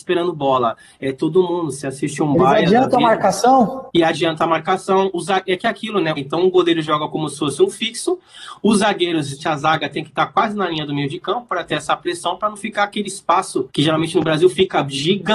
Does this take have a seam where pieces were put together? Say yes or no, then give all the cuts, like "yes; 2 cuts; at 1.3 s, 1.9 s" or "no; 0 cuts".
yes; 2 cuts; at 6.2 s, 9.4 s